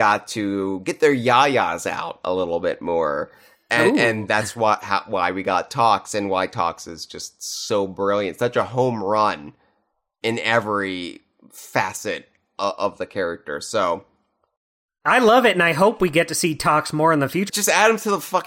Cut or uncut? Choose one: cut